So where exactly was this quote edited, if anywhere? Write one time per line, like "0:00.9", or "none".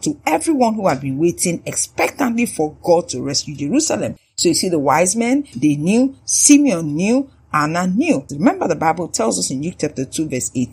0:08.3